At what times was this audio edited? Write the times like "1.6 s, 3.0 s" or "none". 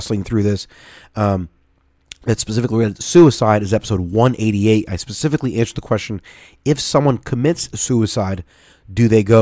none